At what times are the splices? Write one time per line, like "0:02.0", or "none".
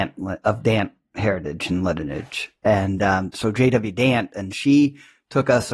none